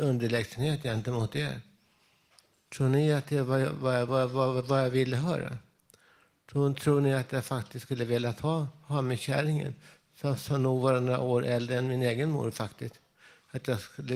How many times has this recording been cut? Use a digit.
0